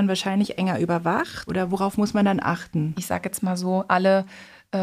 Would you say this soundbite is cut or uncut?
cut